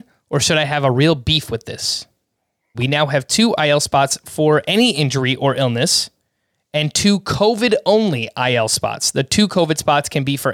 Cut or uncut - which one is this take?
cut